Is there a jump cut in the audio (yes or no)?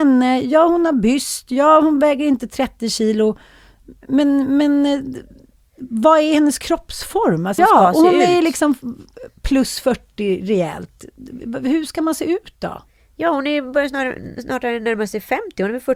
yes